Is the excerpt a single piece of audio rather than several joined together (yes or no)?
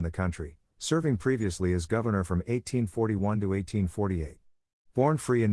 yes